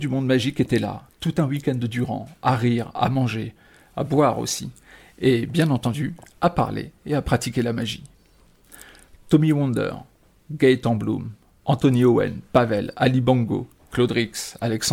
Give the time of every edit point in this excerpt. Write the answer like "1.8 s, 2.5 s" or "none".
none